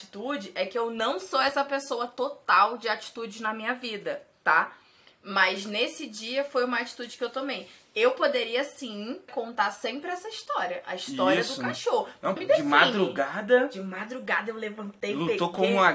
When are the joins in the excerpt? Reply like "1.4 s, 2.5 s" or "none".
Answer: 9.3 s, 12.4 s